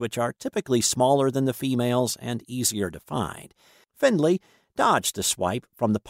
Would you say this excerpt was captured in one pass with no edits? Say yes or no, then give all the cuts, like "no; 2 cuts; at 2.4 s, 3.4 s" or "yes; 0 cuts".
no; 1 cut; at 3.8 s